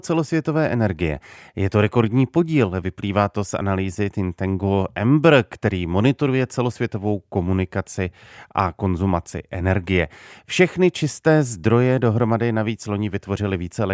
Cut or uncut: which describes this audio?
uncut